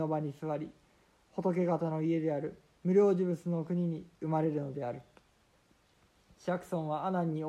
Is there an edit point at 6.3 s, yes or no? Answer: no